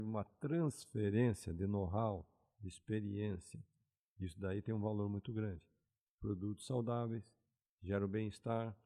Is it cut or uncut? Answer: cut